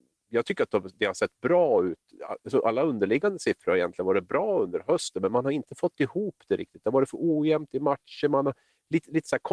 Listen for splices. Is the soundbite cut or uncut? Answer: uncut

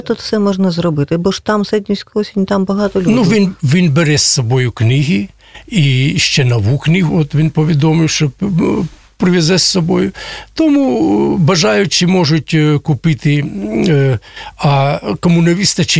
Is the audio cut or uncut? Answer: cut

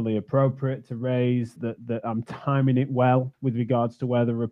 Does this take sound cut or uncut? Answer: cut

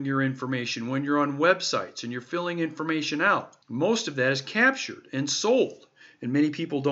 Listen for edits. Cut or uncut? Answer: cut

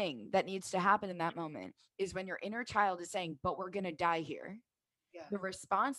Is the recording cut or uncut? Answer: uncut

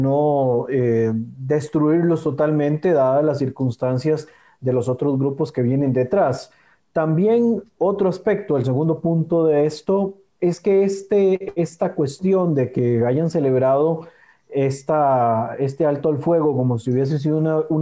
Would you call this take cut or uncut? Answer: uncut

